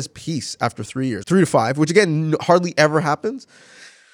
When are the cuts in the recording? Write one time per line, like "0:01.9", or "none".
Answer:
0:01.2